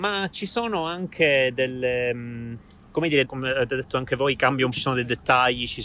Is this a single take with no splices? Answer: no; 2 cuts; at 3.2 s, 4.7 s

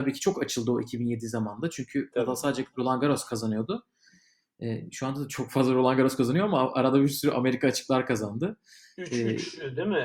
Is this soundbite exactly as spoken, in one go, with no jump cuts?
yes; 0 cuts

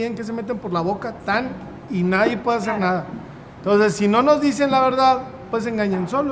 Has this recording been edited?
yes; 1 cut; at 1.2 s

